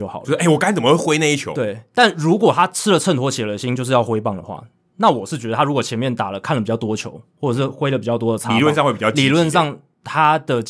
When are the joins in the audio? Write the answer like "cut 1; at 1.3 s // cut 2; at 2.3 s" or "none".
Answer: none